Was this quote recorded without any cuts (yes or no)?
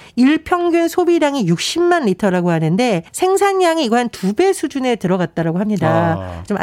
no